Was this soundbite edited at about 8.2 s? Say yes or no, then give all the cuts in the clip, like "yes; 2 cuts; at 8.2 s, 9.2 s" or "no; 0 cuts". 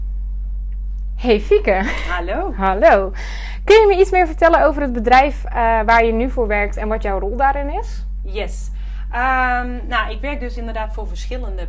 no; 0 cuts